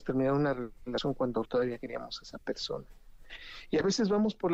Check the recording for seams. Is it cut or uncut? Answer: cut